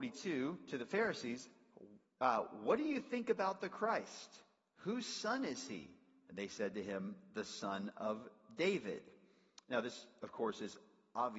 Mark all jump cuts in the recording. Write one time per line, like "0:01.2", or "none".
none